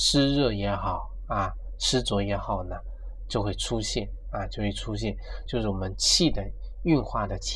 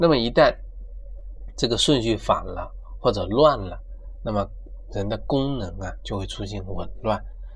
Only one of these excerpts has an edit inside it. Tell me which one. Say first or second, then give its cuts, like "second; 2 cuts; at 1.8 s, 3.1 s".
first; 1 cut; at 5.5 s